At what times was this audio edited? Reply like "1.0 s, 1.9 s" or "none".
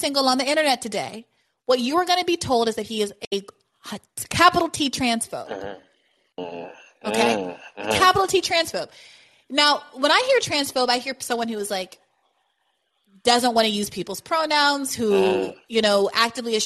none